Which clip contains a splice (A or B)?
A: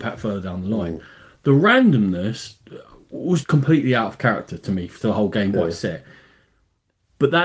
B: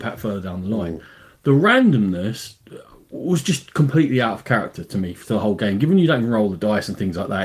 A